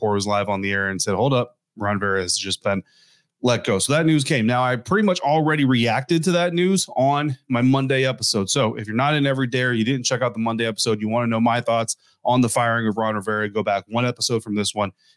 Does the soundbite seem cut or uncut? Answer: uncut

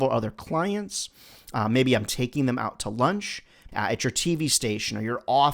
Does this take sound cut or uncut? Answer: cut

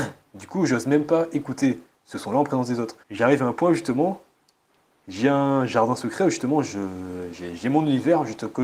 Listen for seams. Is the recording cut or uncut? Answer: cut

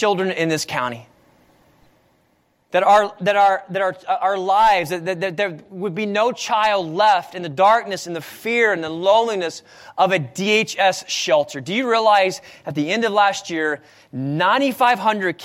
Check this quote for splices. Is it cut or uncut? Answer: uncut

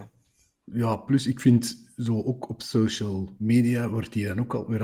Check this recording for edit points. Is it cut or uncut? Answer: uncut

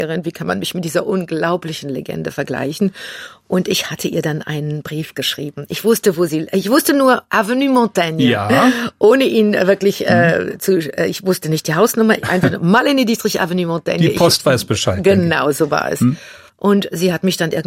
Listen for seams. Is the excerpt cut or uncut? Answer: uncut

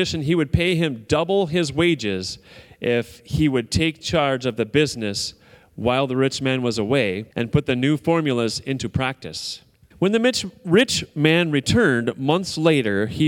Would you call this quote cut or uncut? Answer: cut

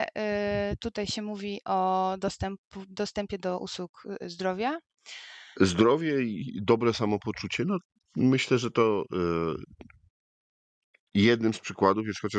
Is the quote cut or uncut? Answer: cut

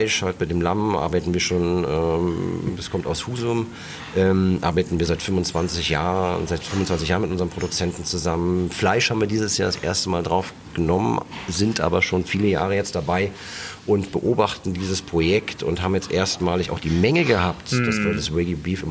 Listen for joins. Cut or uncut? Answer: uncut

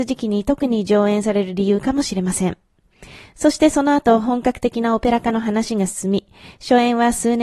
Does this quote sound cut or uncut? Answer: uncut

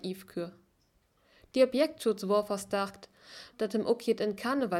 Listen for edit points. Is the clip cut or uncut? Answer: cut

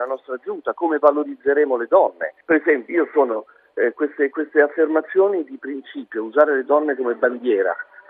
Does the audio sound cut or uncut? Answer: cut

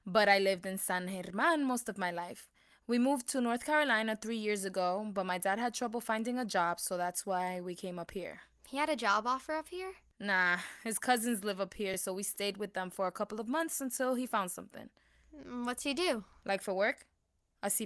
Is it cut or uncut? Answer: uncut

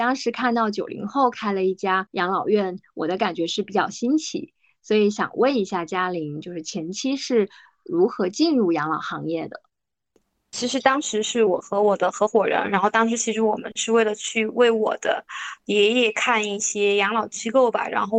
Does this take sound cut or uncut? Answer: uncut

